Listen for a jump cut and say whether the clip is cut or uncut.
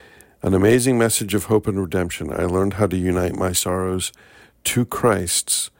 uncut